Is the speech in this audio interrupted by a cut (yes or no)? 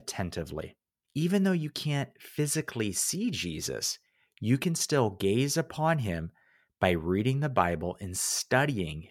yes